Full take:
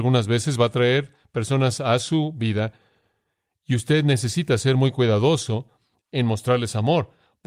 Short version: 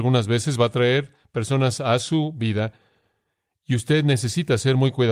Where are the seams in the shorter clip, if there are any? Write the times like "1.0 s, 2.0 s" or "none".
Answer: none